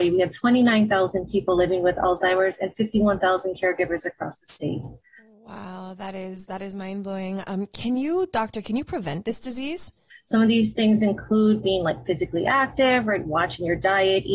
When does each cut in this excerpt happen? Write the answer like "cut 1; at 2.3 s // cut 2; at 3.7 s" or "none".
cut 1; at 10.1 s